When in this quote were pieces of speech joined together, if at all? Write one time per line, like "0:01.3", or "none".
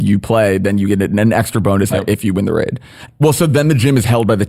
0:01.9
0:03.1